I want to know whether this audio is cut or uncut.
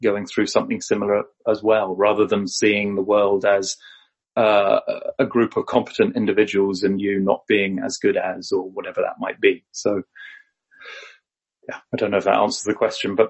uncut